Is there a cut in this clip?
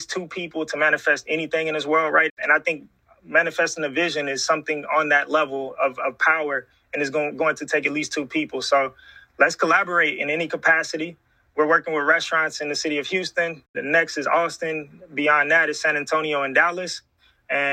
no; 0 cuts

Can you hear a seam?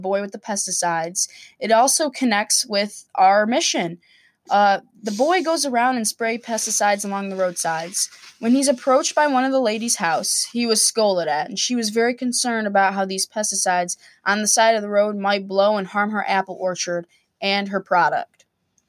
no; 0 cuts

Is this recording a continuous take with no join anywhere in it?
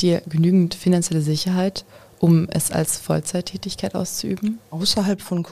yes; 0 cuts

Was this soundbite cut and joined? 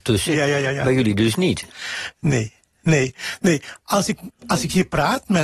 no; 0 cuts

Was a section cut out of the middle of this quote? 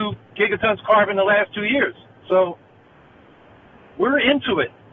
yes; 1 cut; at 2.2 s

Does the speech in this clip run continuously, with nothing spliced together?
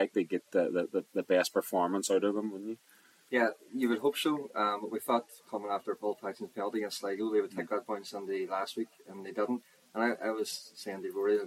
yes; 0 cuts

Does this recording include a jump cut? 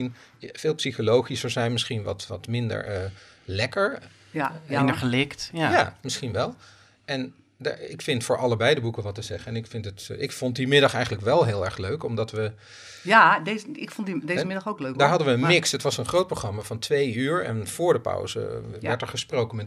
no; 0 cuts

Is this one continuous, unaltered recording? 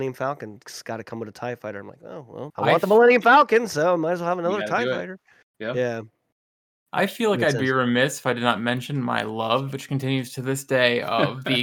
no; 1 cut; at 2.5 s

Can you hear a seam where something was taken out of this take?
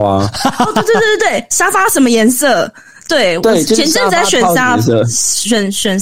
no; 0 cuts

